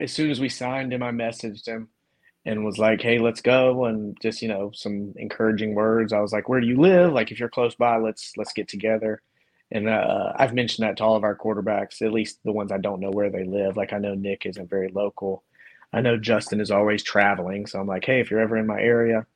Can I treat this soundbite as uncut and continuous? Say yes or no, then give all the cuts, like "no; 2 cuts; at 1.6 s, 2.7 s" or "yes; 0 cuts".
yes; 0 cuts